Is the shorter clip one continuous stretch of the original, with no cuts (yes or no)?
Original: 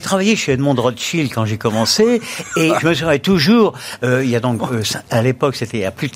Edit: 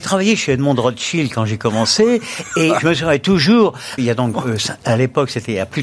no